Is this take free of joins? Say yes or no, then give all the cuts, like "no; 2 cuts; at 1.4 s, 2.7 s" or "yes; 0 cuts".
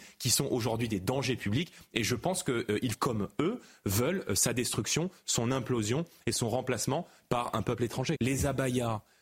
no; 2 cuts; at 2.9 s, 8.2 s